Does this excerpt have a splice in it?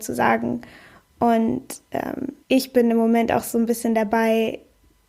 yes; 1 cut; at 2.4 s

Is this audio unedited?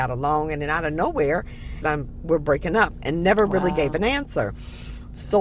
no; 1 cut; at 1.8 s

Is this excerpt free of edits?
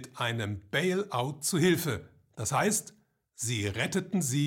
yes; 0 cuts

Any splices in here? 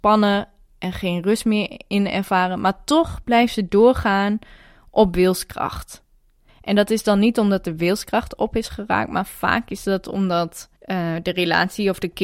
yes; 2 cuts; at 6.5 s, 10.8 s

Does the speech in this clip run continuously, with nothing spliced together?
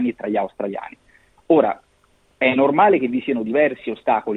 yes; 0 cuts

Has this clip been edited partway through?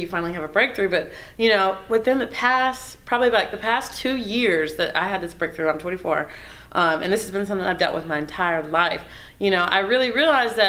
no; 0 cuts

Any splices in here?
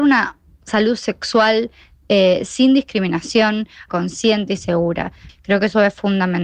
yes; 2 cuts; at 3.9 s, 5.3 s

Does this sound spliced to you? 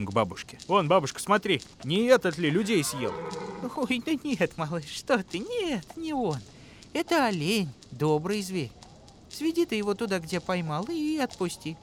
yes; 1 cut; at 1.7 s

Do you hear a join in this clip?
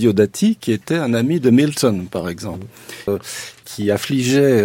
yes; 1 cut; at 3.1 s

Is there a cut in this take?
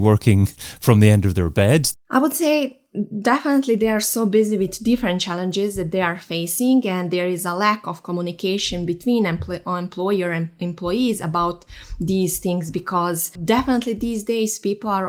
yes; 1 cut; at 1.9 s

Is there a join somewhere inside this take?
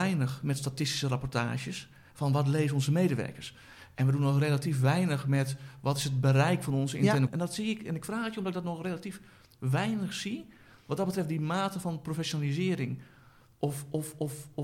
yes; 1 cut; at 7.3 s

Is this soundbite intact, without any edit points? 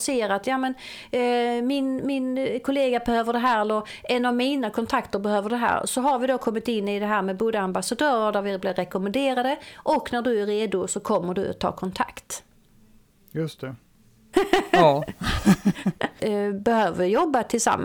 no; 2 cuts; at 14.3 s, 16.2 s

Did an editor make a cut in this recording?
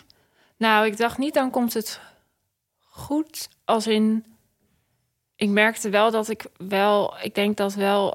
no; 0 cuts

